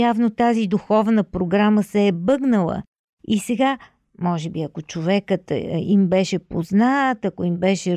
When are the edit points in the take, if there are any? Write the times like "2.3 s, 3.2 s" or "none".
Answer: none